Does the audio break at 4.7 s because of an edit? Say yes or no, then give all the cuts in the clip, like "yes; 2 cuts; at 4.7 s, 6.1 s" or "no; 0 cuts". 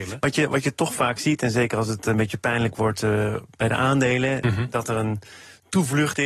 no; 0 cuts